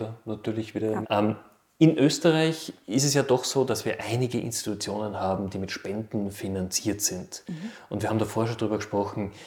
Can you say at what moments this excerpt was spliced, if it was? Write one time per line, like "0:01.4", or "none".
0:01.0